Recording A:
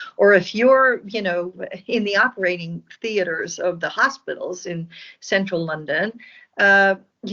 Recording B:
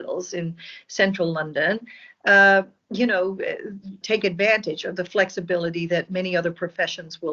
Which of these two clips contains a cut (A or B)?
B